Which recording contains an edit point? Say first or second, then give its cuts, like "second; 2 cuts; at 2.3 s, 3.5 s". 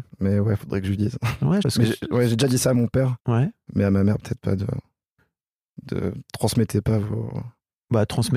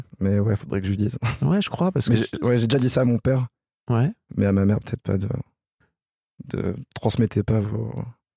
first; 2 cuts; at 1.6 s, 3.2 s